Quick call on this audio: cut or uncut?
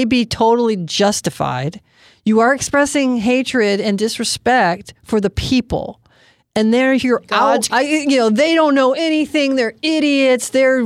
cut